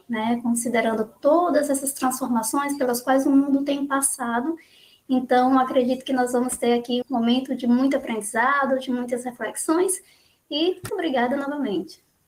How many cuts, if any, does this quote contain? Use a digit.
2